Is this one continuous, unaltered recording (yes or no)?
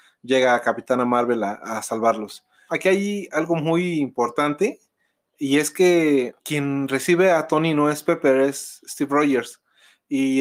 no